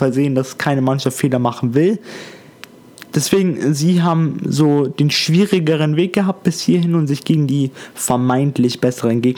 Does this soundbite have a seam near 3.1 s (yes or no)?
yes